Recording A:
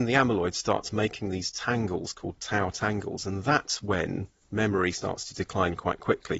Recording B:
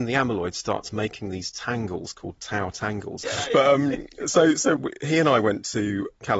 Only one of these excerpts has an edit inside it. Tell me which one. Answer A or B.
B